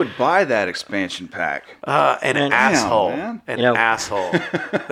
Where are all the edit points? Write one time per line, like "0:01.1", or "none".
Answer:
none